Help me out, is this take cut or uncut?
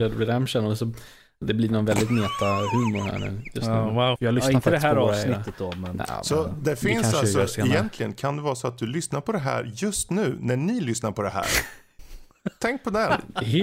cut